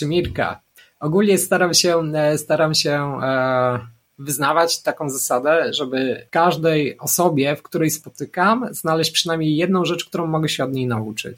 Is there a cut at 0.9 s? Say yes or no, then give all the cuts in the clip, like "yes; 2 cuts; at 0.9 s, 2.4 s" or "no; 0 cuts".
no; 1 cut; at 6.3 s